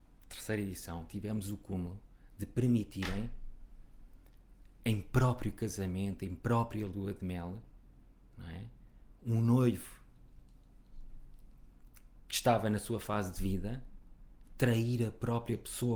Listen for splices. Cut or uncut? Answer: uncut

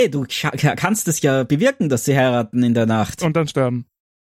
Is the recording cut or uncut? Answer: uncut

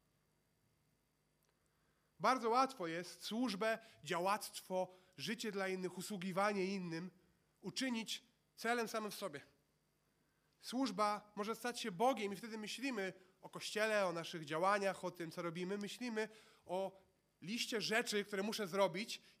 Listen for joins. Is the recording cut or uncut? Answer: uncut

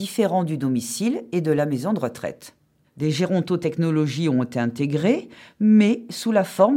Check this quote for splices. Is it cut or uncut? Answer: uncut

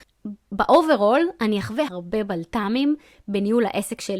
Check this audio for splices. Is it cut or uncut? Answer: cut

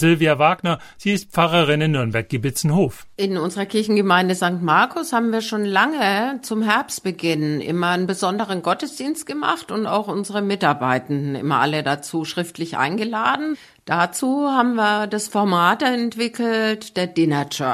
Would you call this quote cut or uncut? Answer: uncut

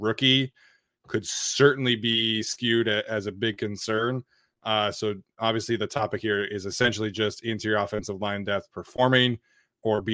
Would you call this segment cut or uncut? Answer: uncut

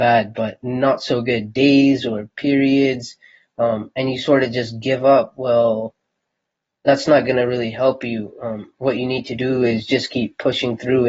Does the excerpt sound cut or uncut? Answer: uncut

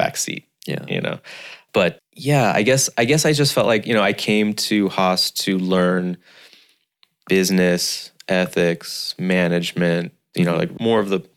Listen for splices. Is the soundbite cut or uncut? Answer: cut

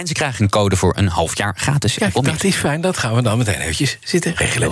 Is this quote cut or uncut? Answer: uncut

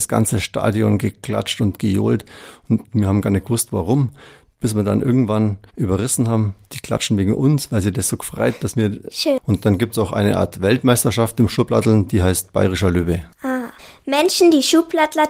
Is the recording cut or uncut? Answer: cut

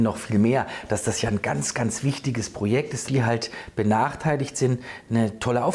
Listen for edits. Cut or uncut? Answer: cut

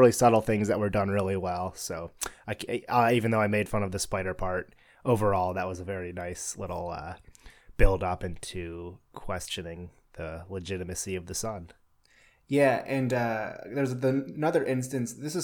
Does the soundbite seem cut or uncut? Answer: uncut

